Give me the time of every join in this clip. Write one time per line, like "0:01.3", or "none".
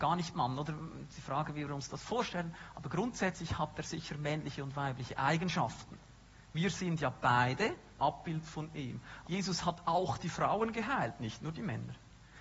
0:08.0
0:09.2